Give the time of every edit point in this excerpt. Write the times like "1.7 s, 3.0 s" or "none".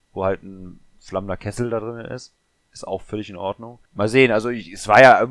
3.9 s